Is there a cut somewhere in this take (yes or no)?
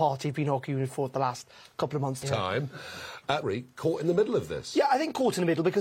yes